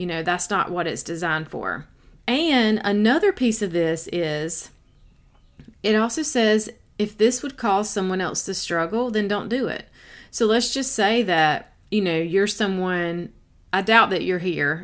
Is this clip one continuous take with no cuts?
no; 1 cut; at 2.2 s

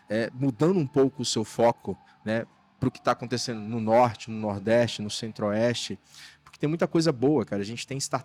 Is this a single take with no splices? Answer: yes; 0 cuts

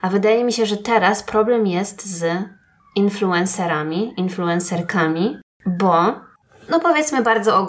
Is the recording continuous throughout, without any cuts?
yes; 0 cuts

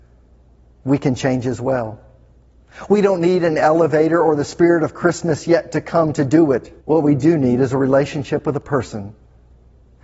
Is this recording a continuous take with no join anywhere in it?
no; 1 cut; at 6.8 s

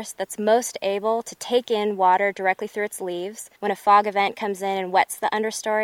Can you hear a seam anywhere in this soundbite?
yes; 1 cut; at 3.6 s

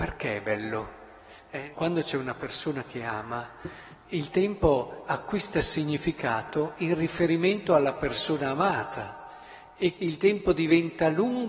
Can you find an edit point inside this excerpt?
yes; 2 cuts; at 1.7 s, 10.0 s

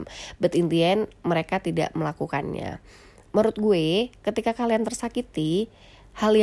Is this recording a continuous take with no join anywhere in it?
yes; 0 cuts

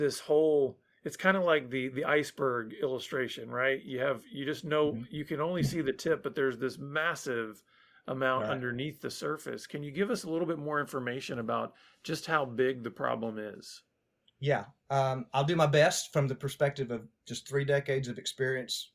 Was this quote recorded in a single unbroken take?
yes; 0 cuts

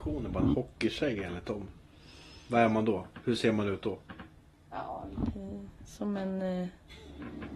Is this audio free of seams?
yes; 0 cuts

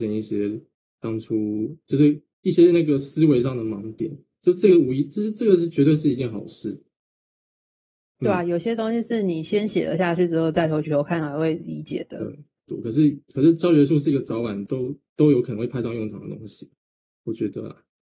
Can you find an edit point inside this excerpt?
yes; 2 cuts; at 12.7 s, 14.7 s

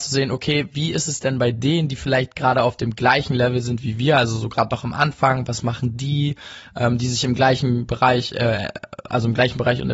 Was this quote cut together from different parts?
no; 0 cuts

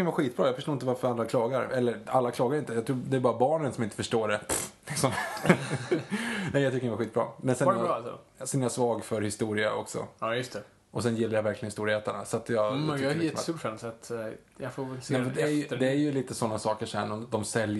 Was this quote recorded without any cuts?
yes; 0 cuts

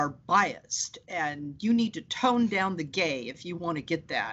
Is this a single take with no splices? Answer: yes; 0 cuts

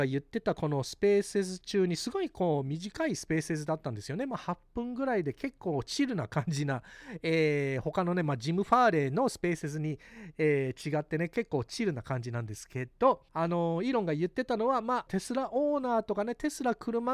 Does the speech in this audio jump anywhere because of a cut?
yes; 2 cuts; at 13.3 s, 15.1 s

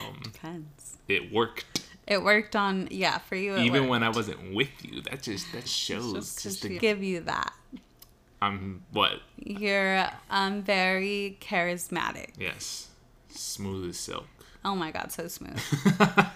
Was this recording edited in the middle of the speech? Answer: yes; 2 cuts; at 5.7 s, 6.8 s

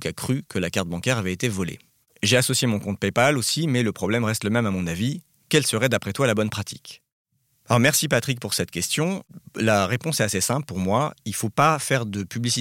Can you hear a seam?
no; 0 cuts

